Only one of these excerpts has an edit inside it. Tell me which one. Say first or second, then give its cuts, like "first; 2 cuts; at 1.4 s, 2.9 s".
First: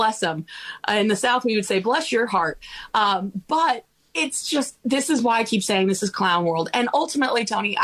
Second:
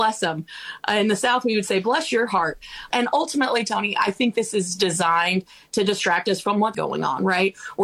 second; 2 cuts; at 2.9 s, 6.7 s